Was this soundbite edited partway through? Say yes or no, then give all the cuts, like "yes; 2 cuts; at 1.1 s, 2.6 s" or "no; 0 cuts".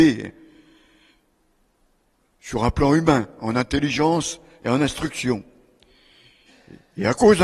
no; 0 cuts